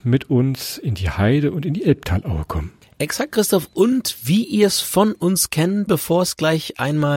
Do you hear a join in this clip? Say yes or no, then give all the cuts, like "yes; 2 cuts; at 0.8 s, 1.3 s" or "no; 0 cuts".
yes; 1 cut; at 5.9 s